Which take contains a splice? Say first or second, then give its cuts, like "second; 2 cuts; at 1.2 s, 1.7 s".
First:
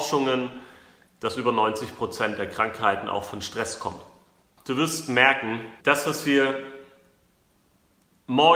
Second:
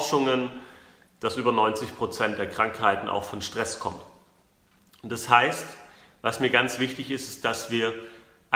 first; 2 cuts; at 4.6 s, 5.8 s